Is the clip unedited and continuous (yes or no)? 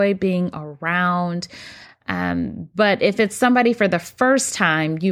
yes